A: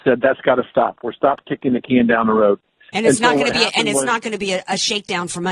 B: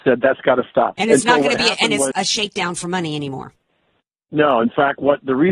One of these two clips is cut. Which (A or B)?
B